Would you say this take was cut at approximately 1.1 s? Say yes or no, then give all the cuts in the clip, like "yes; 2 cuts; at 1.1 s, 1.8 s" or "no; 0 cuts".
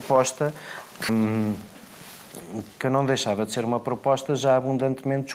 yes; 2 cuts; at 1.1 s, 2.8 s